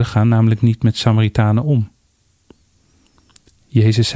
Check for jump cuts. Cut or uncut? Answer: uncut